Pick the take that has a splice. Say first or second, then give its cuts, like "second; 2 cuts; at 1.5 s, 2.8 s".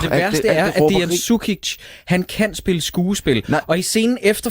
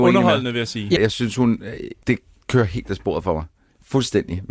second; 1 cut; at 1.0 s